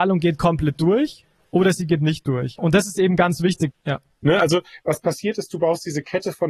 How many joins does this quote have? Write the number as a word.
one